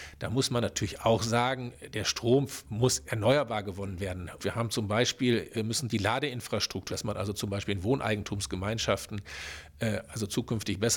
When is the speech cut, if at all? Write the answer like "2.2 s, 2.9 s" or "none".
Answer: 4.4 s, 5.5 s, 6.9 s

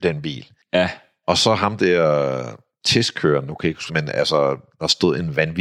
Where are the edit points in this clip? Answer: 3.9 s

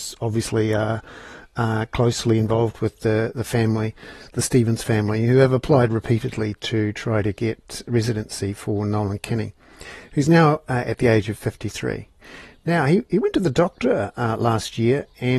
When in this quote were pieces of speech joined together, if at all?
none

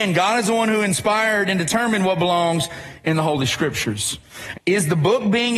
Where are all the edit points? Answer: 4.5 s

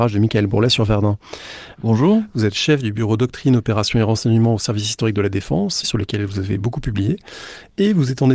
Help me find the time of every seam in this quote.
1.7 s, 5.8 s

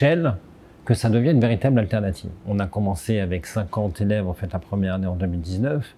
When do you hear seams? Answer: 2.4 s

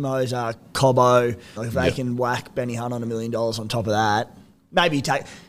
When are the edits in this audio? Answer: 1.6 s

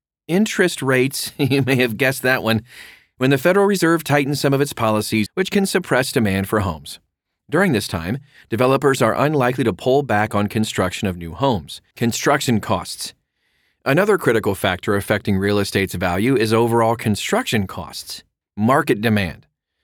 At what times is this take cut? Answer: 5.3 s, 11.9 s, 18.4 s

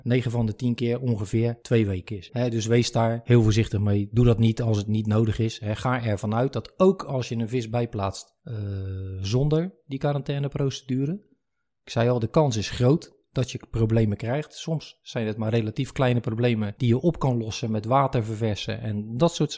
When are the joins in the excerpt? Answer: 2.3 s

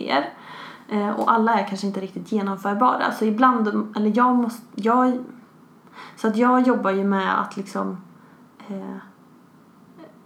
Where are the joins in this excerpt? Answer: none

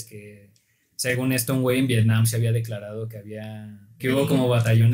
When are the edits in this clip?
4.0 s

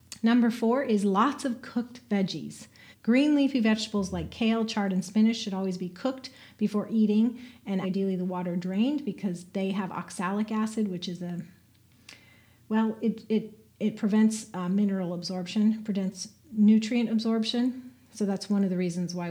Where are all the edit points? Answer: 2.9 s, 7.8 s

